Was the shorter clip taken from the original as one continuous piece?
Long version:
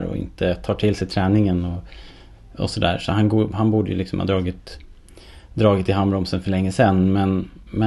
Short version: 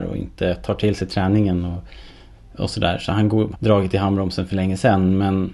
no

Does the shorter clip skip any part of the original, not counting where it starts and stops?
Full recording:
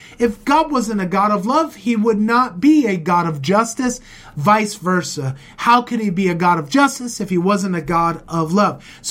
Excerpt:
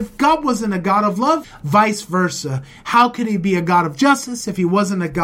yes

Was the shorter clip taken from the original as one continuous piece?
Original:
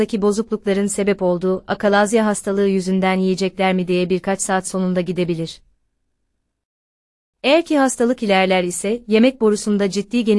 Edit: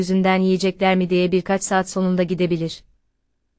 yes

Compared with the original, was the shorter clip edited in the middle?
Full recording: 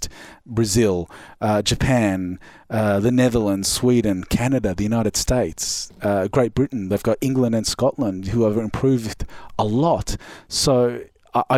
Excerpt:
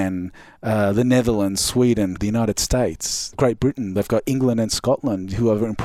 yes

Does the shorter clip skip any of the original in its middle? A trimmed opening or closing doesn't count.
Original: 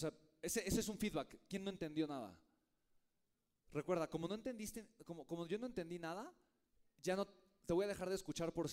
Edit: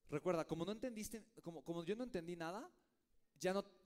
no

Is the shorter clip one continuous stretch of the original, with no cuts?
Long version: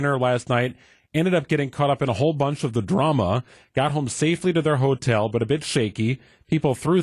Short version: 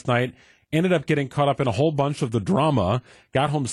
yes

